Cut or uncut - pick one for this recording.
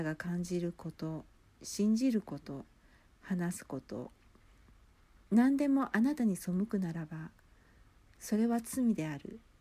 uncut